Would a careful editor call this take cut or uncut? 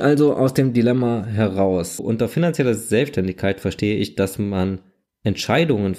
cut